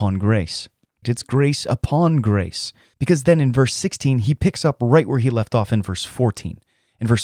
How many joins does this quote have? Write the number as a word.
two